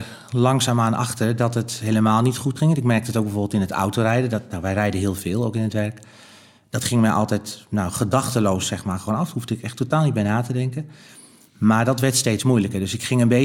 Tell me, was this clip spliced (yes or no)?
no